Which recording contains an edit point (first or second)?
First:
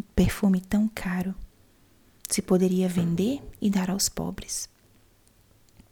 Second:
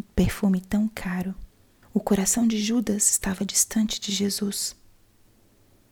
second